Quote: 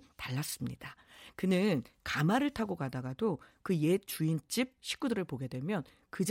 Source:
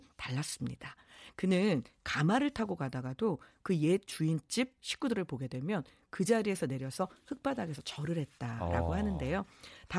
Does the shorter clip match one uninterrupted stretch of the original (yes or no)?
yes